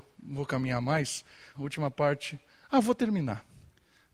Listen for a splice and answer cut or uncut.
cut